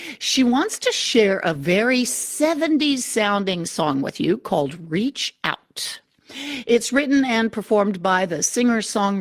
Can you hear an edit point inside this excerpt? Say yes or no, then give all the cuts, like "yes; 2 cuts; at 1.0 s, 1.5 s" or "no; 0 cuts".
no; 0 cuts